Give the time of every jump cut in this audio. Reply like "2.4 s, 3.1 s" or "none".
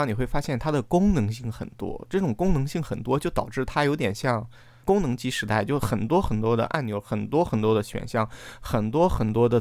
4.8 s